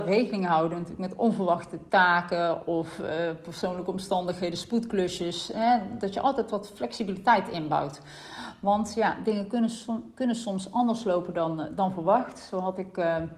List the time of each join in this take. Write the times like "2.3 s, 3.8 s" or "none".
none

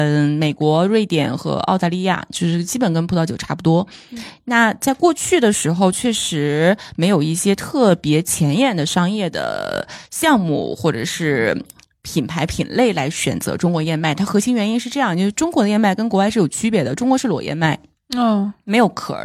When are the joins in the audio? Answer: none

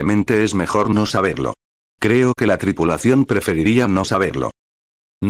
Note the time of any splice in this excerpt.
none

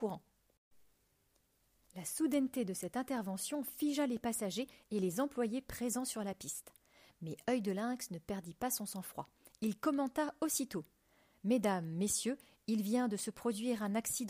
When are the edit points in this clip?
none

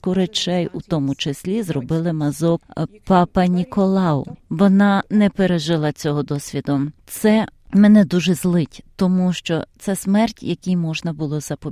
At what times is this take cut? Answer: 4.4 s

